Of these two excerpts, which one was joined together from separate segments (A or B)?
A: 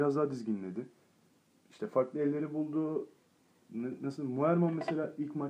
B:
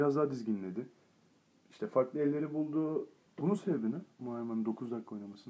B